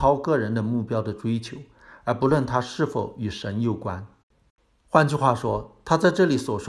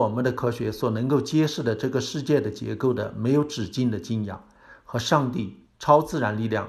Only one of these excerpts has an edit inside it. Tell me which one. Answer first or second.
second